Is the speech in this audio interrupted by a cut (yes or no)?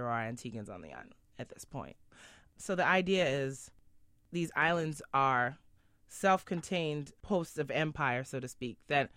no